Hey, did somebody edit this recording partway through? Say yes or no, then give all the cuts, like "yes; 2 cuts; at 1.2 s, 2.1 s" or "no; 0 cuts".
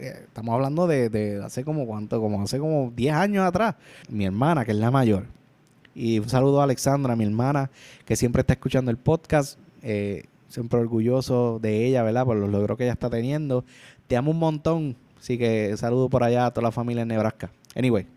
yes; 1 cut; at 4.0 s